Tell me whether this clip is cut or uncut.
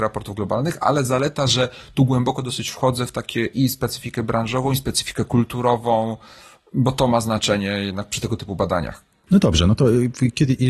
uncut